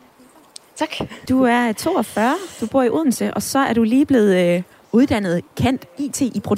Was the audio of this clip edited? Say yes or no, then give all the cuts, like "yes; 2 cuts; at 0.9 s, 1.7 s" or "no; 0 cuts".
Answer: no; 0 cuts